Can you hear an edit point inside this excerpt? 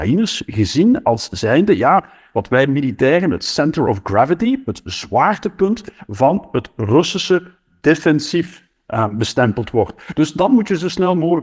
no; 0 cuts

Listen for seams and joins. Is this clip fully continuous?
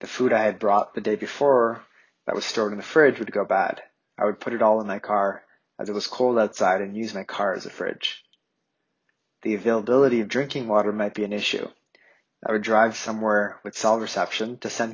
no; 1 cut; at 12.3 s

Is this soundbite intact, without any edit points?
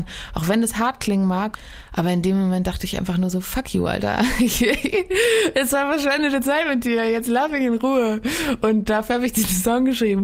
yes; 0 cuts

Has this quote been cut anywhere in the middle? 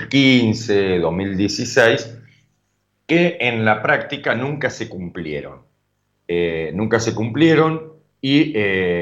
no; 0 cuts

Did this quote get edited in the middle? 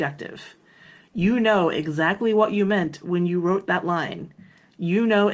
no; 0 cuts

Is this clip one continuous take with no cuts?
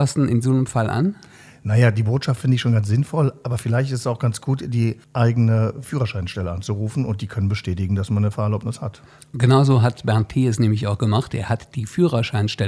yes; 0 cuts

